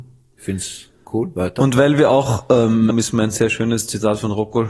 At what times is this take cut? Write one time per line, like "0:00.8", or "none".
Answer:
0:02.9